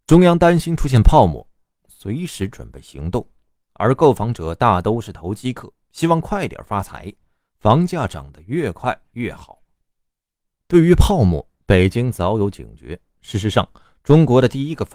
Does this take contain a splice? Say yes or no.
yes